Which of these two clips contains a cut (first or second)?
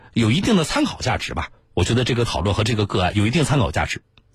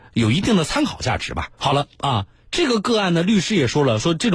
second